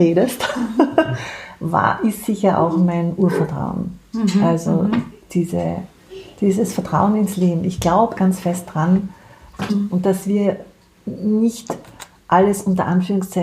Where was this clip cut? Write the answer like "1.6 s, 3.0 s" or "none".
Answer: 8.2 s, 9.7 s

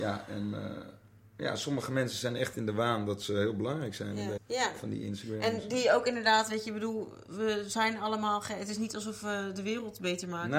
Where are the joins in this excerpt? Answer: 4.4 s

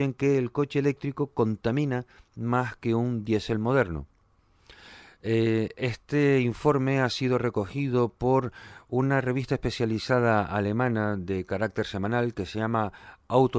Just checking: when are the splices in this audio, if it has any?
none

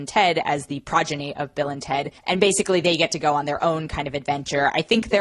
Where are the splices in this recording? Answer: 2.2 s

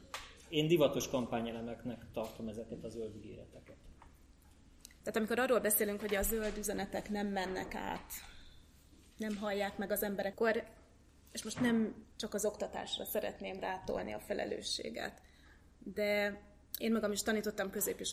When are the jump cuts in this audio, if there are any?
5.0 s, 10.3 s, 12.1 s

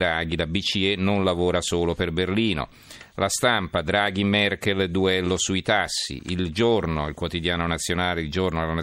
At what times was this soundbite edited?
none

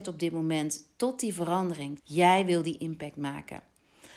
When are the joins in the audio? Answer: 2.0 s

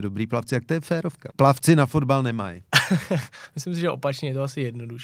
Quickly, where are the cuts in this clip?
1.3 s

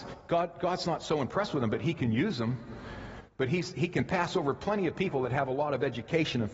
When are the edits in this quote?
none

